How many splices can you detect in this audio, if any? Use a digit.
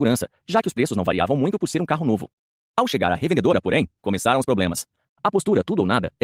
1